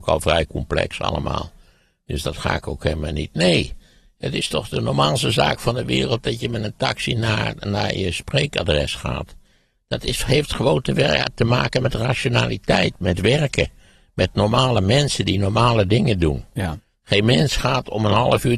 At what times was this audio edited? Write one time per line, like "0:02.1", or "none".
none